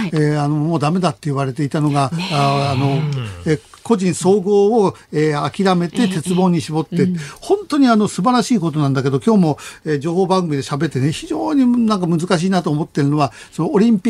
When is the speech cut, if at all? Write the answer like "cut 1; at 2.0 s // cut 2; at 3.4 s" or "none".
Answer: cut 1; at 10.9 s